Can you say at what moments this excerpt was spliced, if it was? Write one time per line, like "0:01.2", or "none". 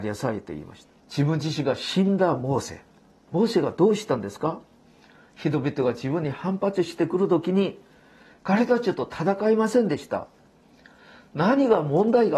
0:01.0